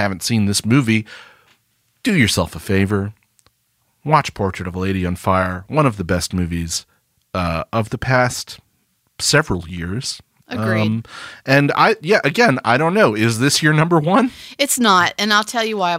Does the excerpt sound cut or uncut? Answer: uncut